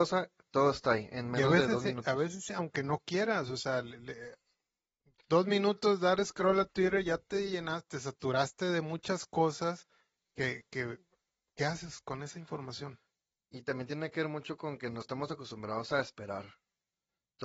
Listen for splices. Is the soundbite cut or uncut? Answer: uncut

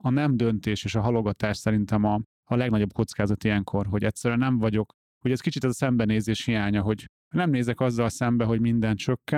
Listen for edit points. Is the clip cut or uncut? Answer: uncut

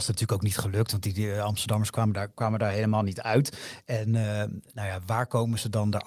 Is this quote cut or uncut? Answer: uncut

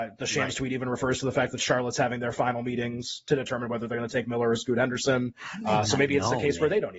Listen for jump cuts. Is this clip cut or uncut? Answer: uncut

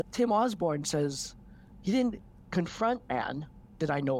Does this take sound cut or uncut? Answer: uncut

